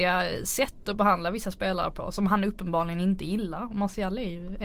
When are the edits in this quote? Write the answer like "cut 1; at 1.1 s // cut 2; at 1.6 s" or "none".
none